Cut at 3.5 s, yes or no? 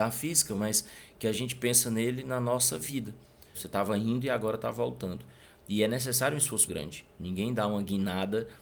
yes